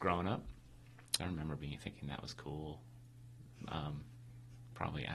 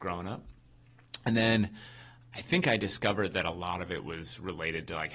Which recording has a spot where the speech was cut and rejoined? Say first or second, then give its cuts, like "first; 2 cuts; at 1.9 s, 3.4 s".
first; 1 cut; at 1.2 s